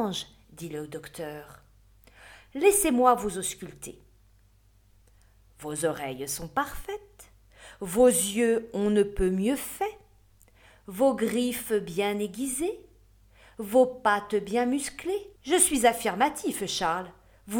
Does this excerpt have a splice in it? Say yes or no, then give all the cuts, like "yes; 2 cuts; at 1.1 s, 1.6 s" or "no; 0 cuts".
yes; 1 cut; at 15.4 s